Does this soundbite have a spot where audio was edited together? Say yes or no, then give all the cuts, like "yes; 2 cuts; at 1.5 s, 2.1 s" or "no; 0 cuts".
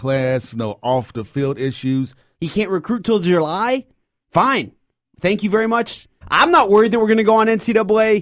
yes; 2 cuts; at 2.3 s, 6.2 s